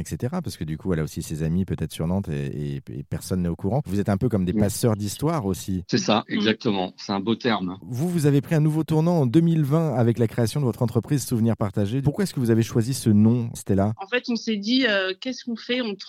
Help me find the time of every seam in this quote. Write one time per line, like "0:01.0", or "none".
0:12.0